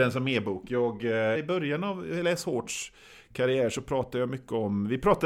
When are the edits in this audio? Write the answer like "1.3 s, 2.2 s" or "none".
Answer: 1.3 s